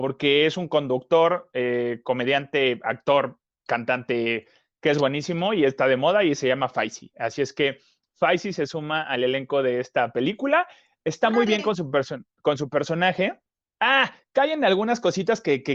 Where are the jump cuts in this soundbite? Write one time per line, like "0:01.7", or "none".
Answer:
0:13.8

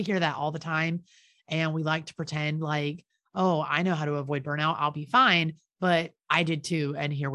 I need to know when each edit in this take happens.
none

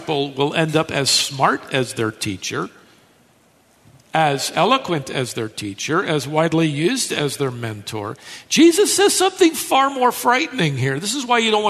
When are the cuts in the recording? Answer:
none

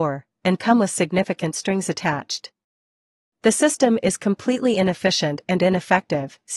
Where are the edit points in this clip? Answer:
0:03.3

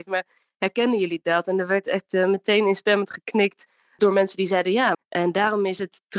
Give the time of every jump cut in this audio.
0:04.9

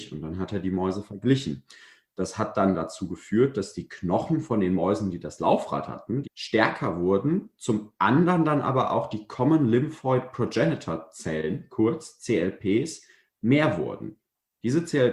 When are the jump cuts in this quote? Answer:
0:06.2

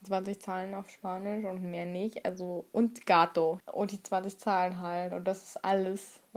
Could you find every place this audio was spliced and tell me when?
0:03.6

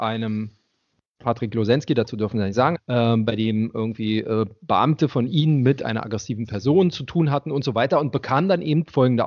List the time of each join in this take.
0:02.8

